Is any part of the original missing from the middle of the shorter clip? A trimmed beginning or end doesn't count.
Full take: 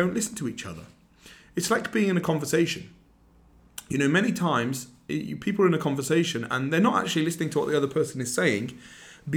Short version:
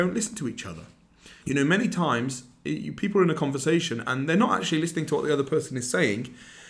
yes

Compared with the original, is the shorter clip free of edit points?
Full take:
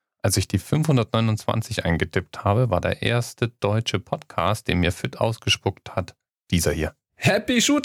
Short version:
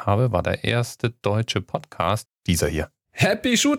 no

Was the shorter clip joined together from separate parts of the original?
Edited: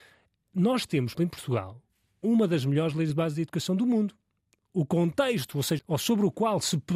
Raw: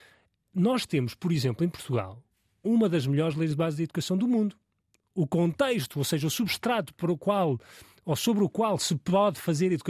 yes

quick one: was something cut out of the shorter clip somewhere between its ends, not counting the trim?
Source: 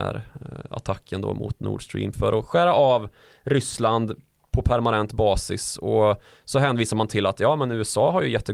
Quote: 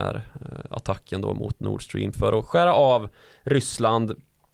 no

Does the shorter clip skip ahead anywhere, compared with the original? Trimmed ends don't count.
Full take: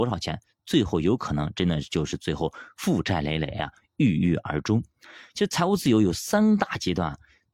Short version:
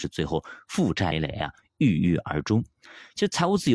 yes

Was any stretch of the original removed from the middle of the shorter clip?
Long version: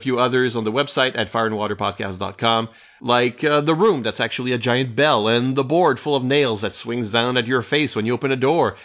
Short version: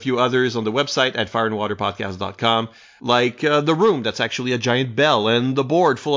no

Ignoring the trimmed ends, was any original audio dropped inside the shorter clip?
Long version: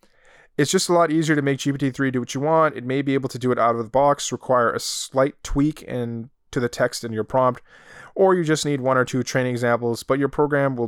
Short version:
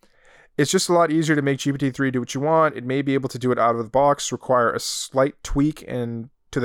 no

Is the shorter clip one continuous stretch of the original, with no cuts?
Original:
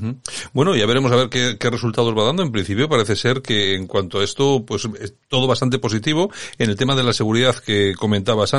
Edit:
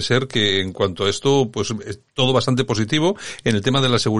yes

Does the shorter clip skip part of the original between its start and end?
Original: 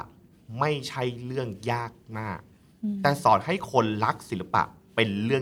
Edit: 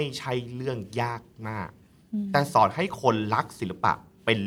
no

